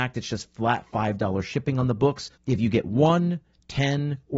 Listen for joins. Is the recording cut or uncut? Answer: cut